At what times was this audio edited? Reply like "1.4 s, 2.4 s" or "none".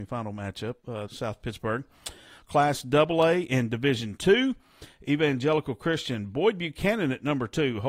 1.1 s